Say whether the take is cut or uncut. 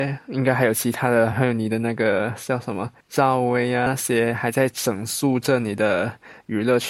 cut